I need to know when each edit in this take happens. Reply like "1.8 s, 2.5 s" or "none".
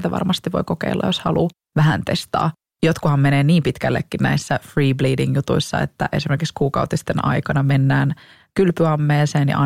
none